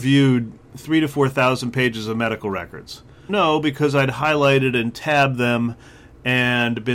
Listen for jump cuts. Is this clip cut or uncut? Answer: cut